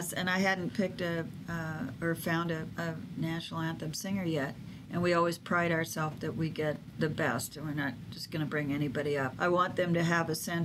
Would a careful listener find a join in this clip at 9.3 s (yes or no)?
yes